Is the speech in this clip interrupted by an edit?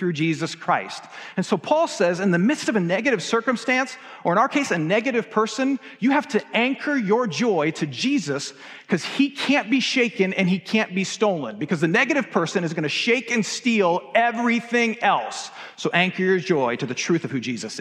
no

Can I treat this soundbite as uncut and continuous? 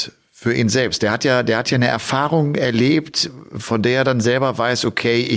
yes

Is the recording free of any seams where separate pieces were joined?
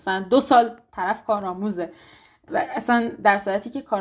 yes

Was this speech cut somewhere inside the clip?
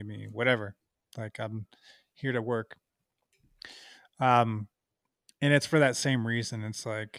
no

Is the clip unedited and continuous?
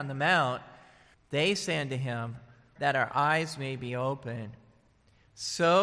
no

